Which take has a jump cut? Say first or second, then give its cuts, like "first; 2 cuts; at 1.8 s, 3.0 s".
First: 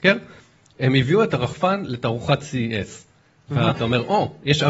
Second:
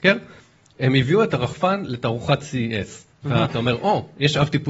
second; 1 cut; at 3.1 s